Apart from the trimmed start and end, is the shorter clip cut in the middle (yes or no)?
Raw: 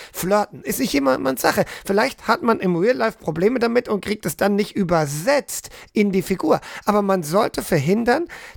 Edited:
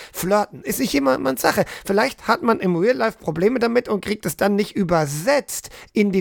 no